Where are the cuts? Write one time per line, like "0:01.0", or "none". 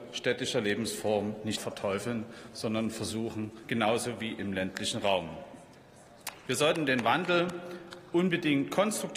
0:01.6
0:03.6